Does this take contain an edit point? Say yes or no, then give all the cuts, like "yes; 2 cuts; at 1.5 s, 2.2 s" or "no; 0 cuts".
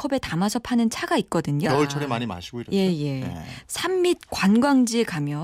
yes; 2 cuts; at 1.6 s, 3.7 s